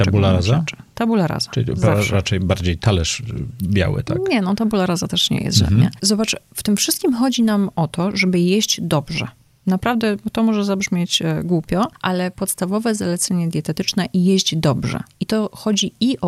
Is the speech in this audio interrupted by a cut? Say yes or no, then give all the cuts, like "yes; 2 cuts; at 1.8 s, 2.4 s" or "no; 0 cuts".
no; 0 cuts